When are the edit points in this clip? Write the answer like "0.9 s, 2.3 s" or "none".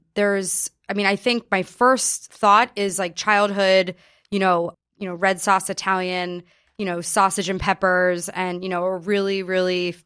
4.7 s